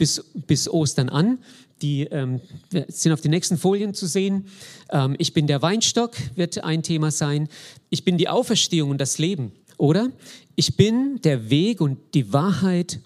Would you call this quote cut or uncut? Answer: cut